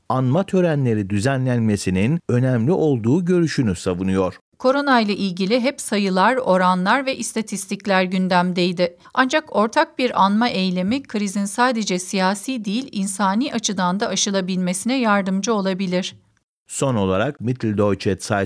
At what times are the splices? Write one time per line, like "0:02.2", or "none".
0:09.0